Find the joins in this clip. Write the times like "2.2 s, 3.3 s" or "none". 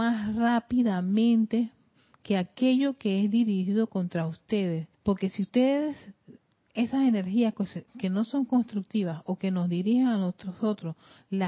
4.9 s, 7.9 s